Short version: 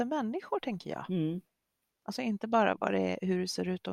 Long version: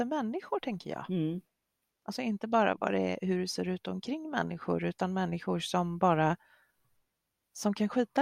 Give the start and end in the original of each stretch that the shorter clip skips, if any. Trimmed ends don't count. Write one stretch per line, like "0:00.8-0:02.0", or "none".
none